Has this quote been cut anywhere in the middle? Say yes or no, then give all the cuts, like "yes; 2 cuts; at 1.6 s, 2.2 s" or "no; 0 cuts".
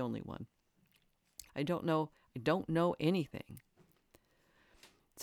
yes; 1 cut; at 1.5 s